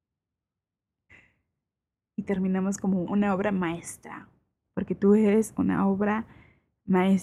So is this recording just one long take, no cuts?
no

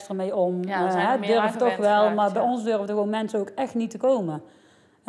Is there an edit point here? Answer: no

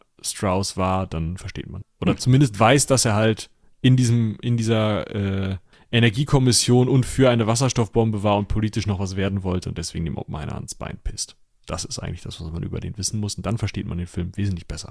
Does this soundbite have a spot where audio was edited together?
no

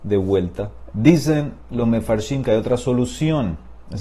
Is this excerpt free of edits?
no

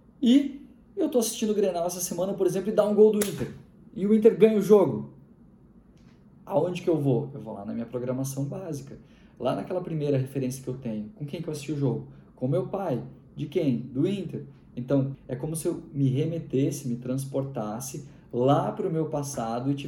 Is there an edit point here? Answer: yes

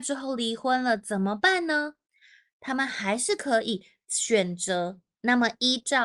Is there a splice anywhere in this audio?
yes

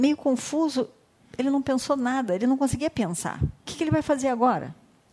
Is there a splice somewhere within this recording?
no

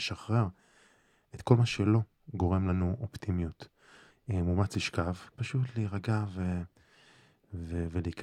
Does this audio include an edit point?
yes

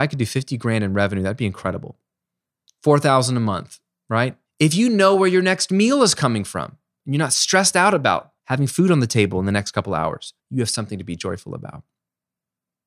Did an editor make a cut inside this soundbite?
yes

